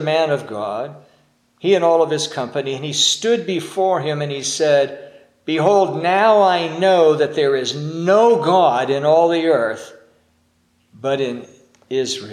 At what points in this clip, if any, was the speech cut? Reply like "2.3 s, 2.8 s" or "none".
none